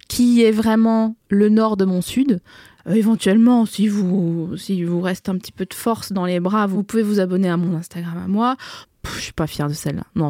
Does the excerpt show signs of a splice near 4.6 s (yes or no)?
no